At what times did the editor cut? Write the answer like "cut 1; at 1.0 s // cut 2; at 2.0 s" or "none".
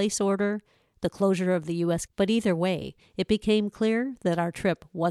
cut 1; at 2.1 s